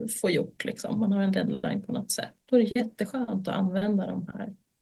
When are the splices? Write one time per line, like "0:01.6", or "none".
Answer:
0:02.4